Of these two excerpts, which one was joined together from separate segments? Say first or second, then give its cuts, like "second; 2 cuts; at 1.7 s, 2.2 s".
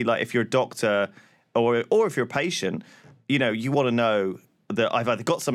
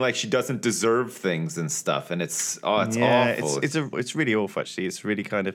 second; 1 cut; at 3.9 s